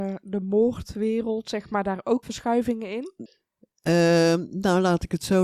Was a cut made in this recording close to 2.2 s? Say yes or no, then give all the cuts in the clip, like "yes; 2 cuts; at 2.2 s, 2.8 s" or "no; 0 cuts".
yes; 1 cut; at 2.2 s